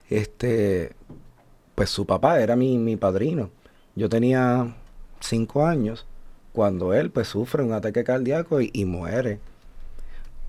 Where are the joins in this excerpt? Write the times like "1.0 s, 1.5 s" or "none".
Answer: none